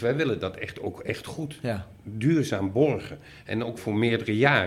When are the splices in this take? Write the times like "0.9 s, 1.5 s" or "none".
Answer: 3.8 s